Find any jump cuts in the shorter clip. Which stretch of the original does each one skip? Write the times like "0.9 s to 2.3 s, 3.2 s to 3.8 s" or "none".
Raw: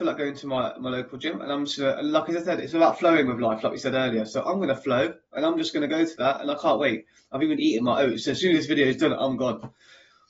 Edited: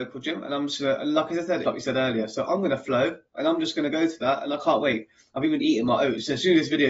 2.6 s to 3.6 s